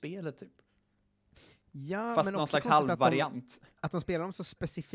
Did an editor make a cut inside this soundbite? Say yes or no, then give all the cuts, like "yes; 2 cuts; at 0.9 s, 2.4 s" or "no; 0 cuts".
no; 0 cuts